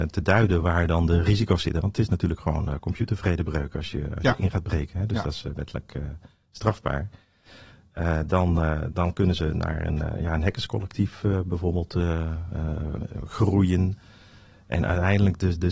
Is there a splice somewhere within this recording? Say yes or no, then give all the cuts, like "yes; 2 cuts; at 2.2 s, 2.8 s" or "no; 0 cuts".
yes; 1 cut; at 8.9 s